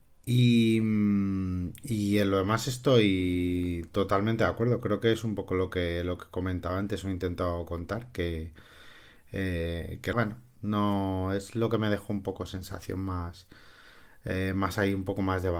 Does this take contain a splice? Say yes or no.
yes